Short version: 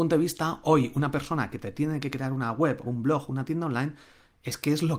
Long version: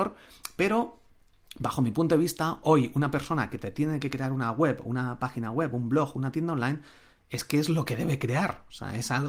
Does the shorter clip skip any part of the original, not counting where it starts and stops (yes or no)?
yes